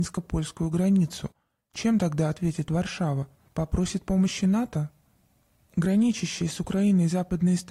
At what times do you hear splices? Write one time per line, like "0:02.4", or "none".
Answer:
0:03.5